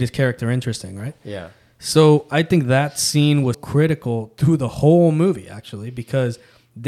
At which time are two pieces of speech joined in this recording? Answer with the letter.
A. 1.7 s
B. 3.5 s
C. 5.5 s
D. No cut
B